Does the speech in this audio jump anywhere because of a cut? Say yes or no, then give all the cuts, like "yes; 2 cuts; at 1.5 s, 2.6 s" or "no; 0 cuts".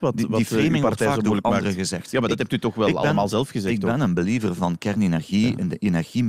no; 0 cuts